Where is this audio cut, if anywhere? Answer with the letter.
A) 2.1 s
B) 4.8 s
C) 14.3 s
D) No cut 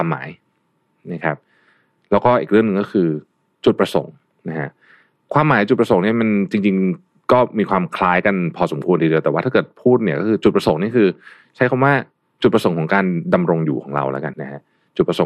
C